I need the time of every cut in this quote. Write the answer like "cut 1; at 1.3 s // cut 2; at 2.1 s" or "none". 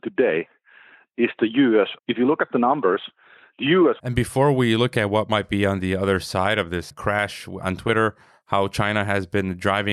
cut 1; at 2.0 s // cut 2; at 4.0 s // cut 3; at 7.6 s